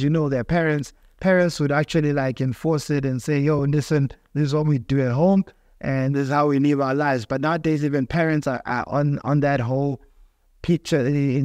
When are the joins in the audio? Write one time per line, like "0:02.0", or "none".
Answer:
none

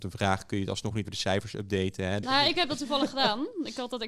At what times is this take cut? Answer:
0:01.0
0:02.2

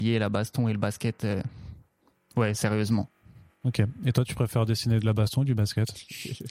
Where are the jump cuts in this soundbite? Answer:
none

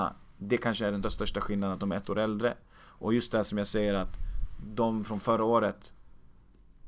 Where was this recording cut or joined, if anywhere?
0:01.0

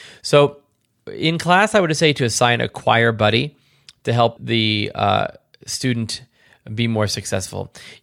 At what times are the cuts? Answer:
0:04.4

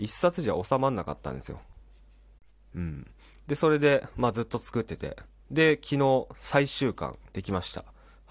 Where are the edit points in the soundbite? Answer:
none

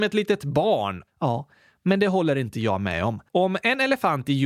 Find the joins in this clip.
0:01.1
0:03.3

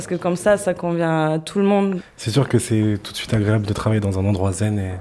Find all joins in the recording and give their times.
none

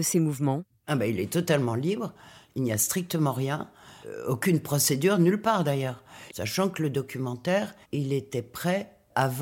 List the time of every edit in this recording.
0:06.3
0:07.8

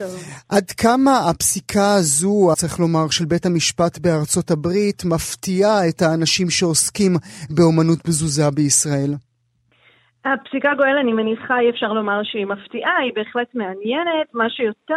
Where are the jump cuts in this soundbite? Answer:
0:02.5

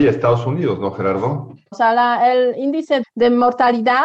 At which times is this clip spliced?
0:01.7
0:03.0

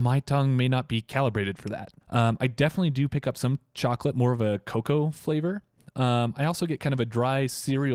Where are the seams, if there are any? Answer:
none

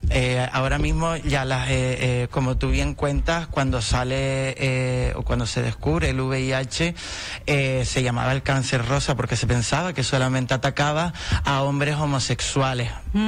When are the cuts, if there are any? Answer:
none

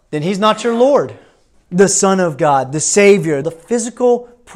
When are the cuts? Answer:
0:01.5
0:03.4

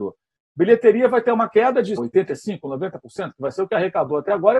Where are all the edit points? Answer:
0:02.0

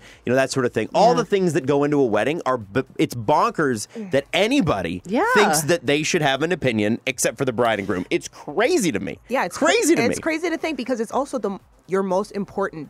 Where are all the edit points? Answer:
none

